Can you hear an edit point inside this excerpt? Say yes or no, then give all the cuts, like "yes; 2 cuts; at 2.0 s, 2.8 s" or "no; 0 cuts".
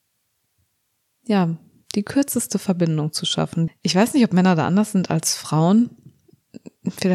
yes; 1 cut; at 3.7 s